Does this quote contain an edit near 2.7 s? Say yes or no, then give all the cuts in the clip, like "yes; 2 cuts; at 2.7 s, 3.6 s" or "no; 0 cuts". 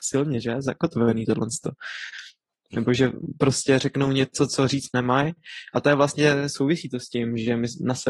yes; 1 cut; at 2.7 s